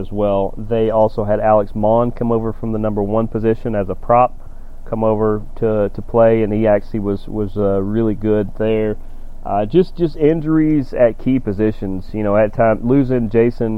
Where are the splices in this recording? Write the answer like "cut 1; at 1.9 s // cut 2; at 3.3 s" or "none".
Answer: none